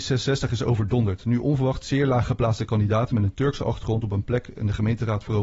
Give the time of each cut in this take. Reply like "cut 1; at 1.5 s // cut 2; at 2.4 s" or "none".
none